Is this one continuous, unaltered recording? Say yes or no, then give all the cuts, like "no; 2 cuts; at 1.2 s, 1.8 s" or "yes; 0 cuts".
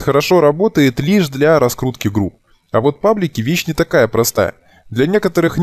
yes; 0 cuts